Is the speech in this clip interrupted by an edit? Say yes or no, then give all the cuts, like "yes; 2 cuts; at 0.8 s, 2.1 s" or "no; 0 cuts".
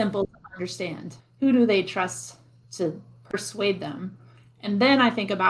yes; 1 cut; at 1.2 s